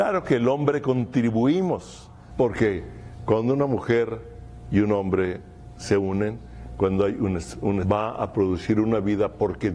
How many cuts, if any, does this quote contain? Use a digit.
2